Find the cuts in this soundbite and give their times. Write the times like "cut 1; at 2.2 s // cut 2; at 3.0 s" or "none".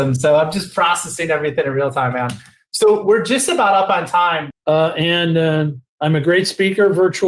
cut 1; at 4.5 s // cut 2; at 5.9 s